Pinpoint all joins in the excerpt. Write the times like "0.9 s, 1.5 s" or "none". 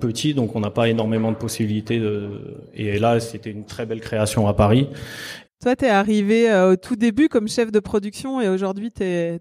5.4 s